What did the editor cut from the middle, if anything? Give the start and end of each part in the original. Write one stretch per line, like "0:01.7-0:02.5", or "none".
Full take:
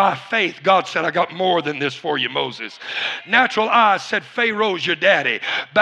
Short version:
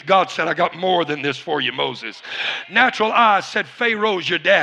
none